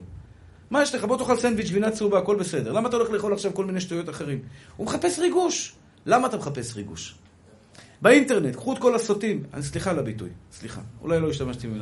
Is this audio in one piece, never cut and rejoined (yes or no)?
yes